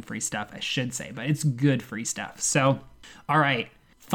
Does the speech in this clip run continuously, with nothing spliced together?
yes; 0 cuts

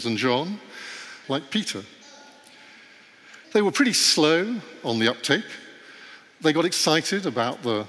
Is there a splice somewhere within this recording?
yes; 2 cuts; at 1.2 s, 3.4 s

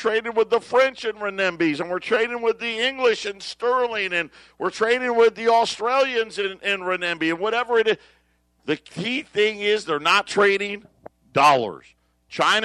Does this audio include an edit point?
no; 0 cuts

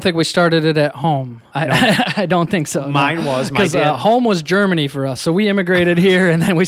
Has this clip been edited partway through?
no; 0 cuts

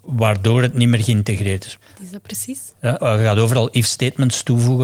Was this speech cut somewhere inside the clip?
yes; 2 cuts; at 1.8 s, 3.0 s

